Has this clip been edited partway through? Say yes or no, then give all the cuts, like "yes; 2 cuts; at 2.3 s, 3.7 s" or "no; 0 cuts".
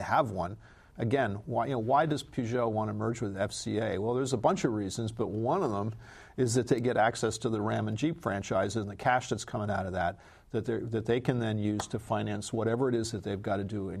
no; 0 cuts